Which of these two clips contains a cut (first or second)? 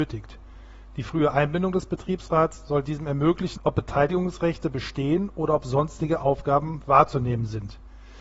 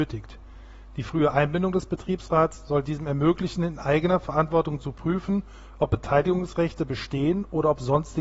first